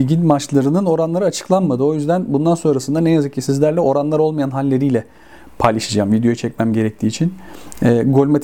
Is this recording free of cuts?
yes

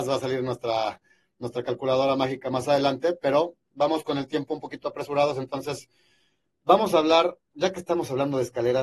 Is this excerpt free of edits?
yes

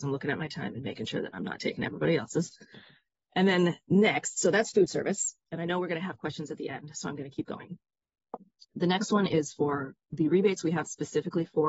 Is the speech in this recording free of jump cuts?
yes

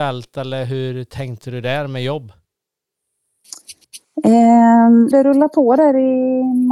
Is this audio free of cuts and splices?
no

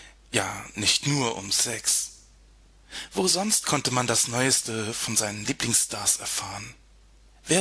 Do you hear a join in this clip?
no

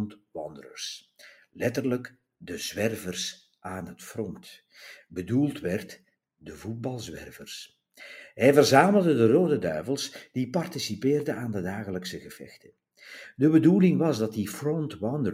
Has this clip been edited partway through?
no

